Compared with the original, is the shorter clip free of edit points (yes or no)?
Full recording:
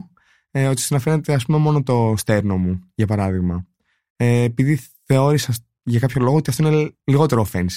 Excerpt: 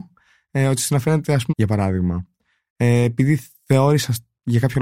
no